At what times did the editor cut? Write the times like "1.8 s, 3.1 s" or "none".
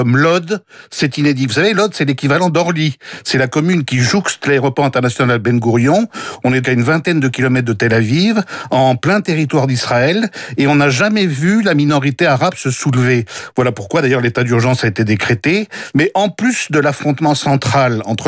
6.6 s, 15.9 s